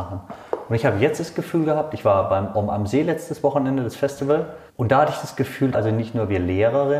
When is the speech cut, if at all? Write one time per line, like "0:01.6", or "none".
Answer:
0:04.7
0:05.7

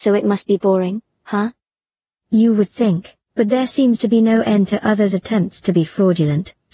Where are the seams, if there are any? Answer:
0:03.2

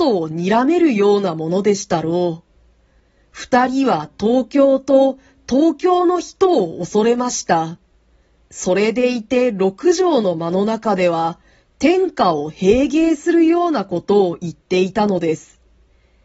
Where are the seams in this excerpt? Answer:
none

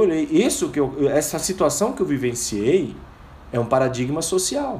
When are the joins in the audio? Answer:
none

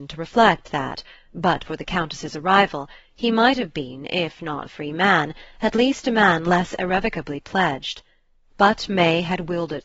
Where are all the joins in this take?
0:04.7

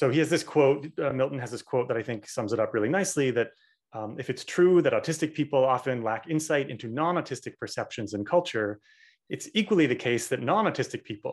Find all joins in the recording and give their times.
none

